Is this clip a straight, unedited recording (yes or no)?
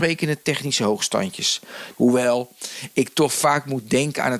no